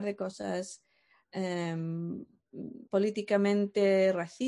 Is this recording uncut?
no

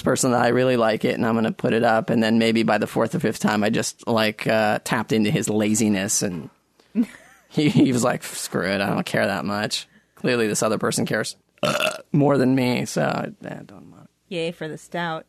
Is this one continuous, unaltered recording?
yes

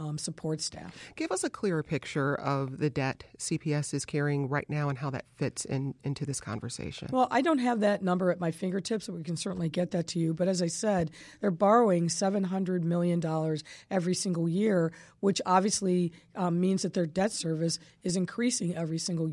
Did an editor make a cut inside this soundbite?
no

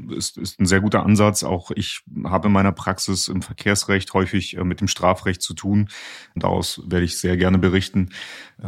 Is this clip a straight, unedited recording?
no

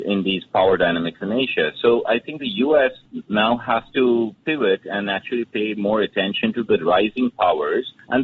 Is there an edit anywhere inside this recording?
no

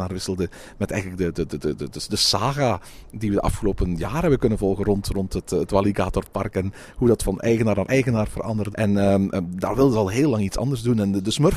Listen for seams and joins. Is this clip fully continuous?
no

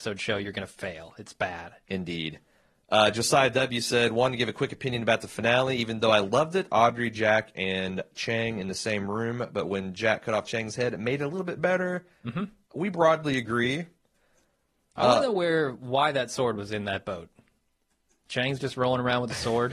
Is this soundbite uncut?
no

